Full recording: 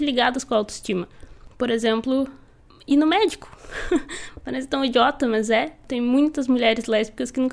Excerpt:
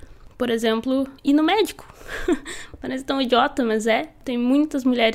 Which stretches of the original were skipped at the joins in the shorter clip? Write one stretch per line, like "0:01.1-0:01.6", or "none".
0:02.4-0:02.8

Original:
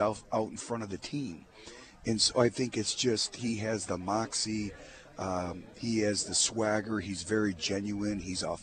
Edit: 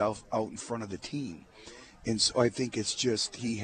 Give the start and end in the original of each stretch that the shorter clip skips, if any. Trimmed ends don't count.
none

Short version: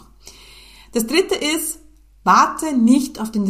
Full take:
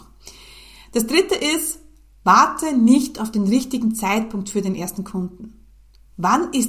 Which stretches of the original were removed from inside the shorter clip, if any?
none

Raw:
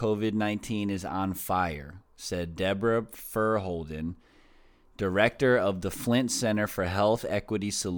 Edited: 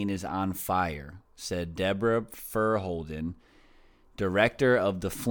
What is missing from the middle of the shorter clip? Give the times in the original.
none

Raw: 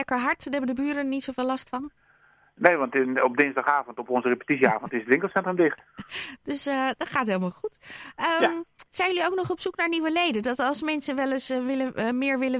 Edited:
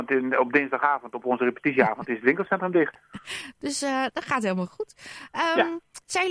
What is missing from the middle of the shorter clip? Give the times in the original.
none

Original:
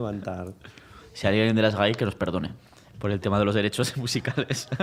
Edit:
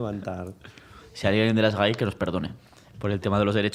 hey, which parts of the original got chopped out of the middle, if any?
none

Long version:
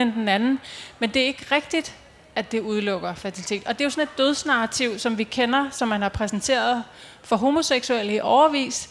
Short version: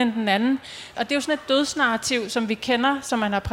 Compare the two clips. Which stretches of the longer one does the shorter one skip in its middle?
0:00.9-0:03.6

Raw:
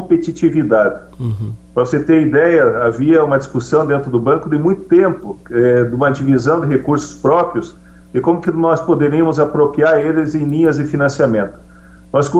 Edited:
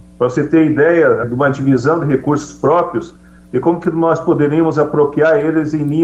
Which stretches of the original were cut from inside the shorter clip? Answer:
0:02.8-0:05.8

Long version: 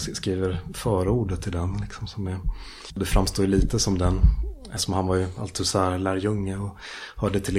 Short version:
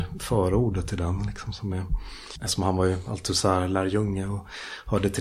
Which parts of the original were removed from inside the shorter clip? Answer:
0:02.9-0:04.7

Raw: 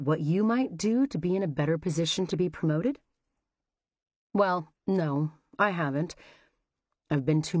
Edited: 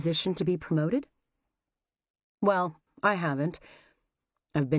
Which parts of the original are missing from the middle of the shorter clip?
0:04.8-0:05.4

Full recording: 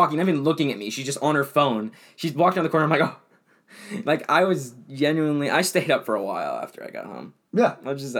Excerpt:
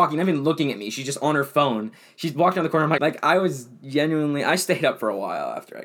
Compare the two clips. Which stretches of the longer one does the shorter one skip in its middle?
0:03.0-0:04.0

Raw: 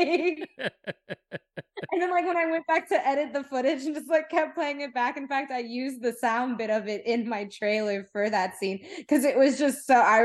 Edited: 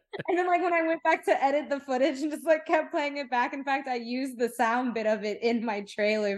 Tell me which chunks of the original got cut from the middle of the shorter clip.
none

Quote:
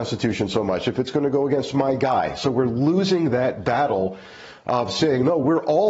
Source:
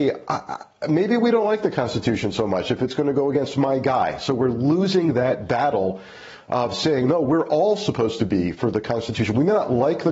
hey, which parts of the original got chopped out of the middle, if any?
none

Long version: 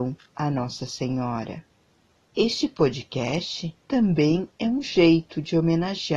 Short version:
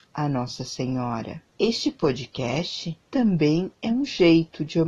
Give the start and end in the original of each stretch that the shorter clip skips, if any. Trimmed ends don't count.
0:01.7-0:02.3

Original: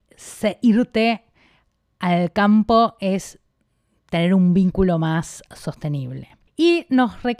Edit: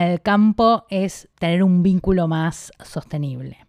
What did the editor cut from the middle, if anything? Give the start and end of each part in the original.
0:03.4-0:04.0

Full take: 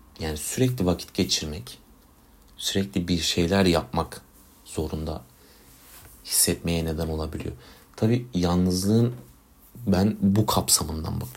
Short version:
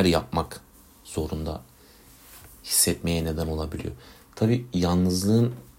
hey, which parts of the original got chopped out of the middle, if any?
none

